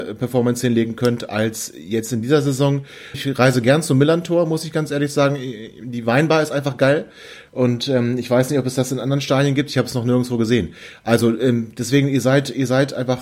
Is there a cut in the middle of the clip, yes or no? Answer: yes